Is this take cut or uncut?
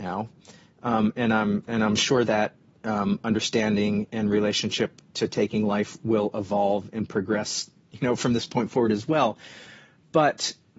cut